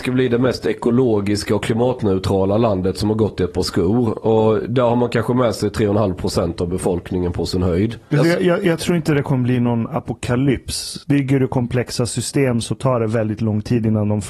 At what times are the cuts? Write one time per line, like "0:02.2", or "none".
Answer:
0:08.1
0:11.0